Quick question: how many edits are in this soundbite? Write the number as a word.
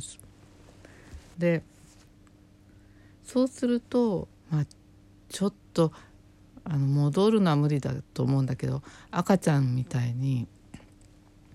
two